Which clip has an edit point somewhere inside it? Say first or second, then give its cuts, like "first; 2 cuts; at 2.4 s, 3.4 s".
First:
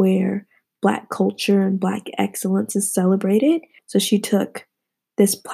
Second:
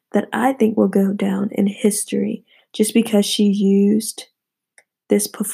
first; 1 cut; at 3.8 s